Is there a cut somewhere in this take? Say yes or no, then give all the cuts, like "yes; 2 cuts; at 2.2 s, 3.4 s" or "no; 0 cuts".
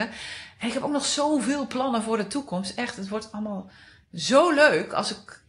no; 0 cuts